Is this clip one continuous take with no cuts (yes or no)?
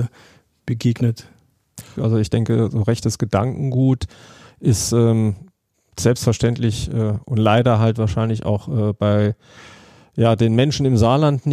no